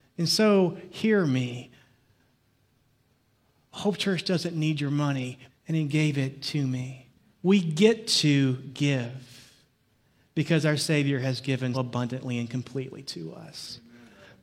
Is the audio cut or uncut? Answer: cut